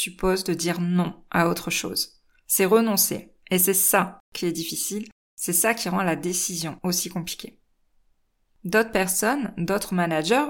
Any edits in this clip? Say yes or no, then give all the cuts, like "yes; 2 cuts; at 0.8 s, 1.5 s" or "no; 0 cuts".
no; 0 cuts